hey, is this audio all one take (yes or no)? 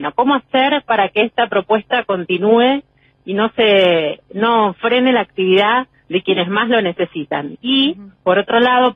yes